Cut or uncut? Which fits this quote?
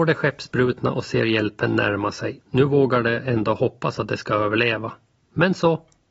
cut